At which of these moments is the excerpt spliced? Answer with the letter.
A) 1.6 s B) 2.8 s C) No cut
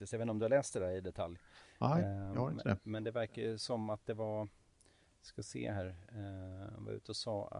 C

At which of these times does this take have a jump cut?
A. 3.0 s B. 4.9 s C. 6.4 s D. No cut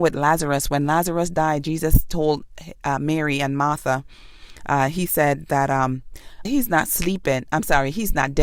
C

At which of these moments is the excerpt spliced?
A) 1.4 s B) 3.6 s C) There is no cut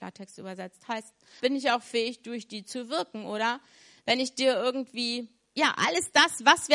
A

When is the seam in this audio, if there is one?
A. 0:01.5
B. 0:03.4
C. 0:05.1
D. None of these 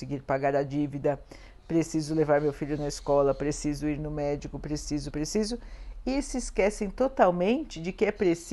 C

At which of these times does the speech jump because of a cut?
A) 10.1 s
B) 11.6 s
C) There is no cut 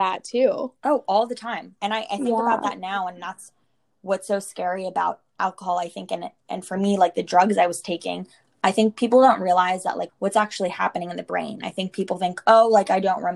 A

